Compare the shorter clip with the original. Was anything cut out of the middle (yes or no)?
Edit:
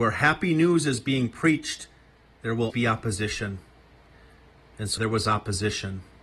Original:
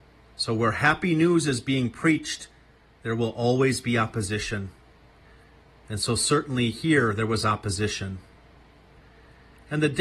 yes